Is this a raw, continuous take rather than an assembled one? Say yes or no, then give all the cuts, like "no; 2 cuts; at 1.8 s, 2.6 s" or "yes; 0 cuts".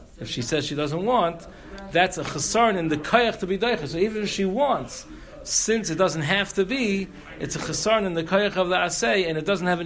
yes; 0 cuts